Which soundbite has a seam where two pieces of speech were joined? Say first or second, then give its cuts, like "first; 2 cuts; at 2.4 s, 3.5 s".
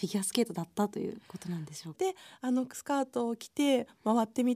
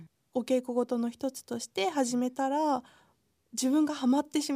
first; 1 cut; at 1.9 s